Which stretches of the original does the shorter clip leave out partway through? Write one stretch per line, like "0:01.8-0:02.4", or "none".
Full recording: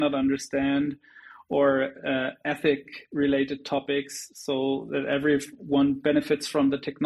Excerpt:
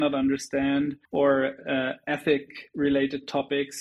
0:01.0-0:01.4